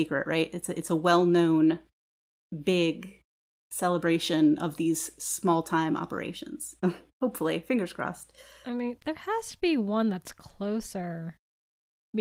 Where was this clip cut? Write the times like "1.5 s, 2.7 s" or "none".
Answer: 6.8 s